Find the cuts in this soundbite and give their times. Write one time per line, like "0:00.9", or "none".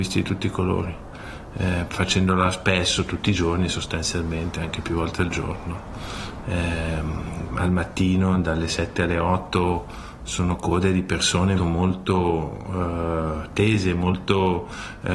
0:07.5
0:11.6